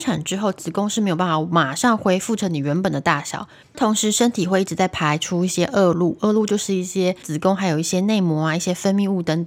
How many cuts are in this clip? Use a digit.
1